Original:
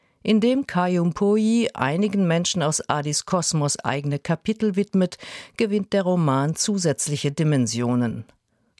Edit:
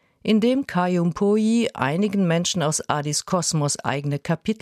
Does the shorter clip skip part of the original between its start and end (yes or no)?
no